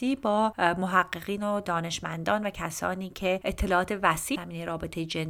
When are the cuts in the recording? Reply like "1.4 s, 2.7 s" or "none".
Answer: 4.3 s